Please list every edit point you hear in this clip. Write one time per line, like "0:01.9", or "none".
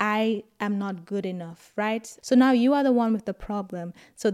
0:02.2